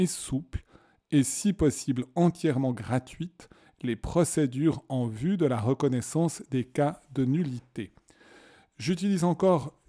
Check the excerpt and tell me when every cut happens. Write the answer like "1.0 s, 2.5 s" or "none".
none